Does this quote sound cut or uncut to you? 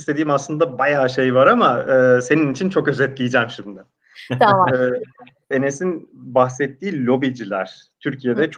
cut